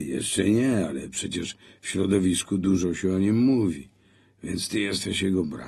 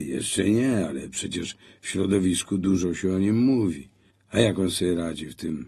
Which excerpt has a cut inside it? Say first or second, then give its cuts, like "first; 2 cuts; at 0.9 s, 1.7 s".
second; 1 cut; at 4.1 s